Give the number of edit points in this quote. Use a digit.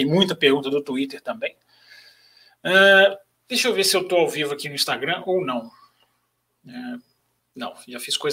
1